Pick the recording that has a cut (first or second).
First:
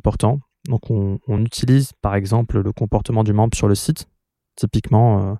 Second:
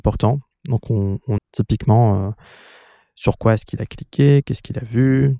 second